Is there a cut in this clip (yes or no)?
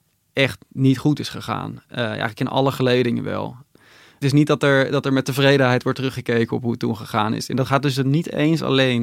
no